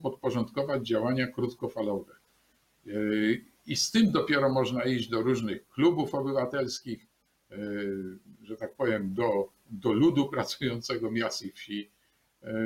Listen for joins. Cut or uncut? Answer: uncut